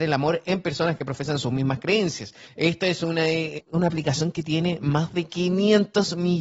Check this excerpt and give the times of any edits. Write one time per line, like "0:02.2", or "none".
0:02.5
0:03.6